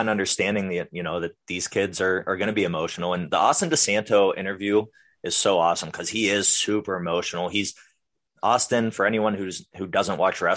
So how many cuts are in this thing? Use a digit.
0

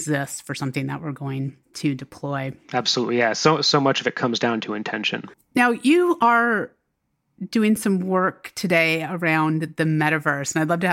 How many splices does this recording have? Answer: 1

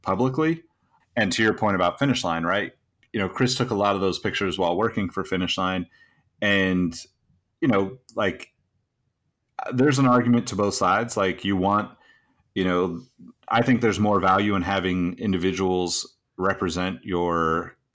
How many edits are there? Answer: 1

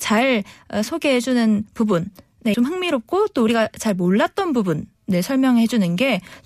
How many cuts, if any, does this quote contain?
1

